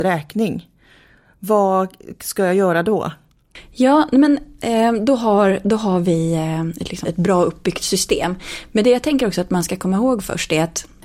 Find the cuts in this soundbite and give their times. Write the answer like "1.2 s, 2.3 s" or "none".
7.0 s